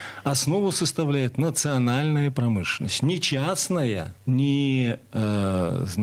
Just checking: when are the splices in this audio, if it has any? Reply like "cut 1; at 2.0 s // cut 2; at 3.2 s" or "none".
cut 1; at 4.2 s